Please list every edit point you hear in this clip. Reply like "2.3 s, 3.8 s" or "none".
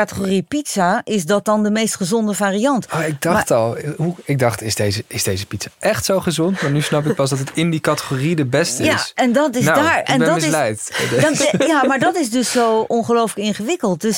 none